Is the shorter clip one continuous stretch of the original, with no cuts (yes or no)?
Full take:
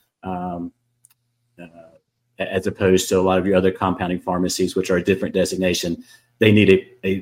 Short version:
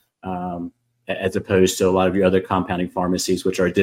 no